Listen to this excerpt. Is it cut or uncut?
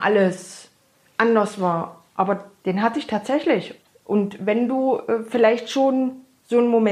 uncut